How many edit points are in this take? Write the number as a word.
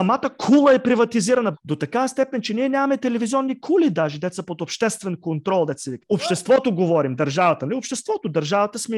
two